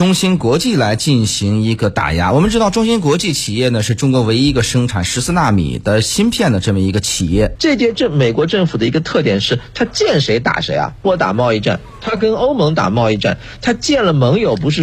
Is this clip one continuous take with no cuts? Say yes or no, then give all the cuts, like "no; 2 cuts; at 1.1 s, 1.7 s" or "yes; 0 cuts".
no; 1 cut; at 7.6 s